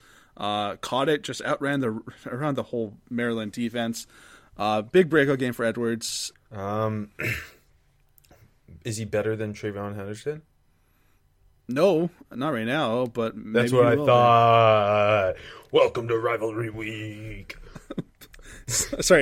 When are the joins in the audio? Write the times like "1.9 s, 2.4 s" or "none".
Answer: 6.3 s